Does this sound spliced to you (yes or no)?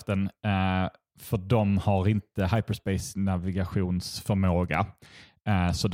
no